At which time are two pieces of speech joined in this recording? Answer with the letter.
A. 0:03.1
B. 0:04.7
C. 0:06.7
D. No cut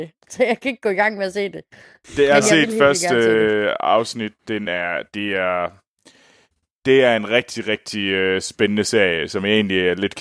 D